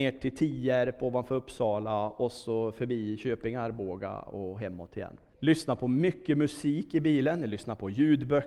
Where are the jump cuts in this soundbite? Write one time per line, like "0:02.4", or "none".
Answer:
0:05.3